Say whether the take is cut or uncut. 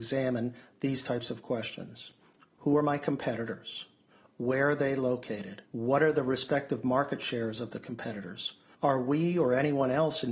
cut